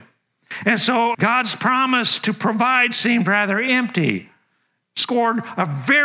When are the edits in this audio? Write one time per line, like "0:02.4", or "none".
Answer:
0:01.1

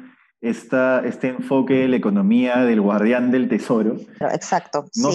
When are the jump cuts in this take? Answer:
0:04.2

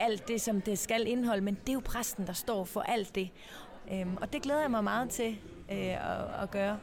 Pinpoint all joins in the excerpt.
0:03.8

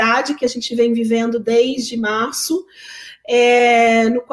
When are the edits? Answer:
none

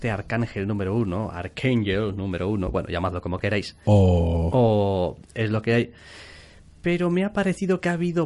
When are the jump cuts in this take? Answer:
0:03.9

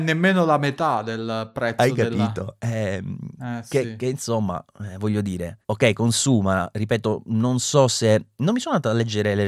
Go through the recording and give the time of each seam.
none

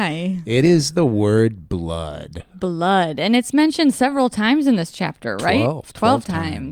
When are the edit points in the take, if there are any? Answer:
none

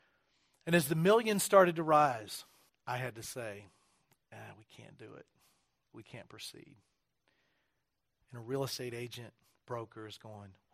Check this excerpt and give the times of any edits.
0:02.7

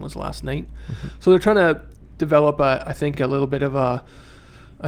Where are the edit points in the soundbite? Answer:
none

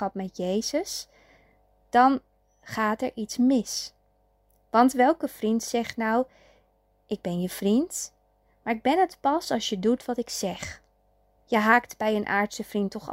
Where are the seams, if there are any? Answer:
0:11.4

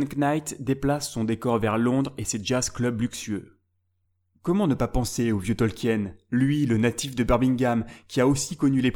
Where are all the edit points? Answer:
none

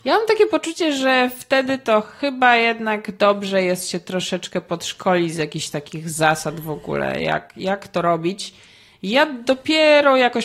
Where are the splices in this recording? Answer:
none

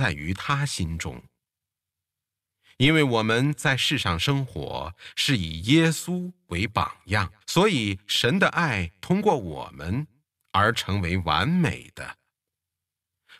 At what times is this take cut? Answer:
0:07.4

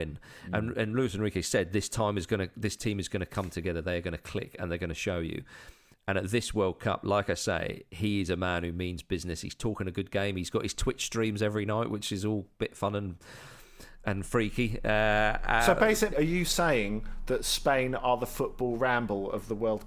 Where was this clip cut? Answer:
0:16.1

